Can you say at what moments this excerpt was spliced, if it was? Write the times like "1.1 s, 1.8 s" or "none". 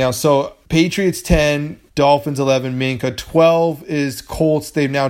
1.9 s

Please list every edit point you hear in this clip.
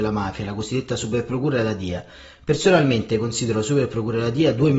none

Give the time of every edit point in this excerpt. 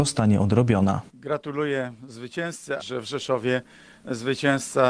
1.1 s, 2.8 s

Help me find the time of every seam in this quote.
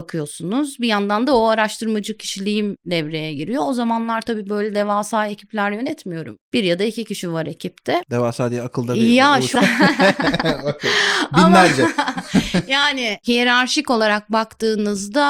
8.0 s, 9.6 s

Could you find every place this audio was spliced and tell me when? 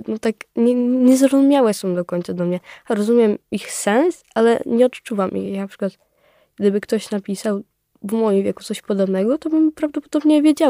none

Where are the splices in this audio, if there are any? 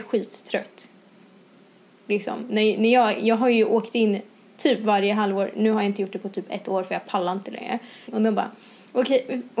8.1 s

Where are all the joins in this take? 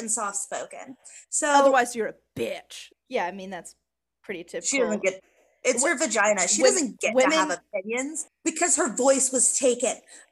2.9 s, 8.3 s

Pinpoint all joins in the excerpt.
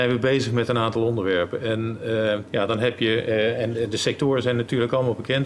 2.5 s

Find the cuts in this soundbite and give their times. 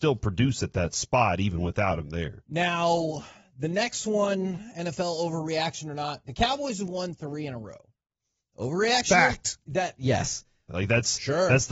10.7 s

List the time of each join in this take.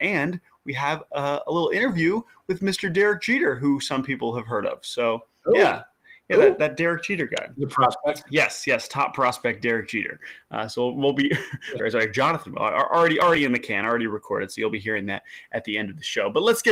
11.8 s

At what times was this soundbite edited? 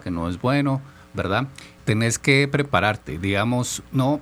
1.8 s

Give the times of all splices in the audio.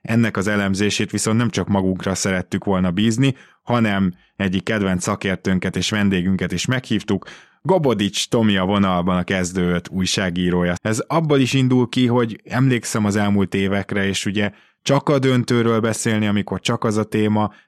10.8 s

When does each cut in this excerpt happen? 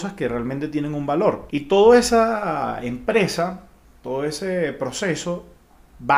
1.5 s

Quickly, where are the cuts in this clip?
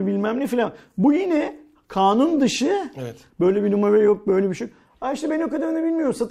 3.3 s

